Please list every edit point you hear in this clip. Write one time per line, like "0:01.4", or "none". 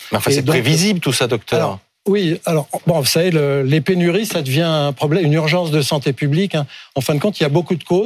none